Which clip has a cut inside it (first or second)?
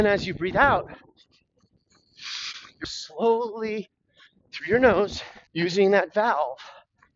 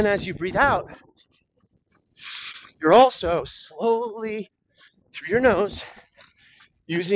first